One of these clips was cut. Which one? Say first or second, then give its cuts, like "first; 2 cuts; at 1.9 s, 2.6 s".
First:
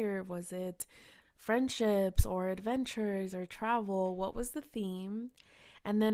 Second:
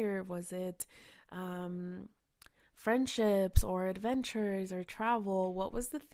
first; 1 cut; at 1.2 s